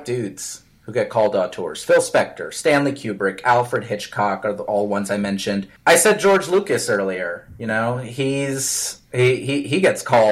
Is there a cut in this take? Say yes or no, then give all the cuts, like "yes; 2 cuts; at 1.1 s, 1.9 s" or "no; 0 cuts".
yes; 1 cut; at 5.8 s